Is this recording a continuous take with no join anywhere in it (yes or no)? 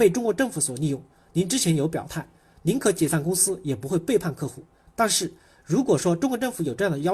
yes